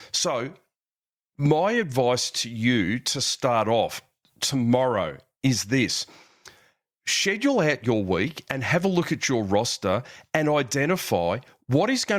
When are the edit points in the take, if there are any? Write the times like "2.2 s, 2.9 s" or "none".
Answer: none